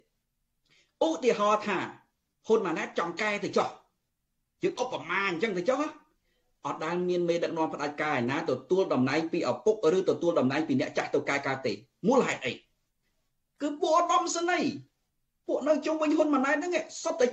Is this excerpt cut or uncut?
uncut